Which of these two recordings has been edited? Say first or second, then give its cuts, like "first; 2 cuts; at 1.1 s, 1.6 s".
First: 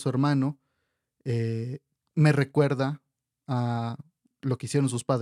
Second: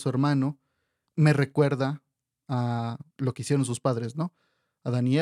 second; 2 cuts; at 1.1 s, 3.1 s